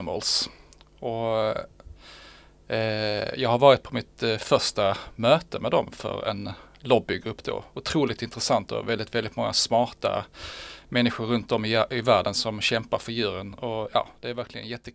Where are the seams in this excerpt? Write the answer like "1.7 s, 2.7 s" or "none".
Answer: none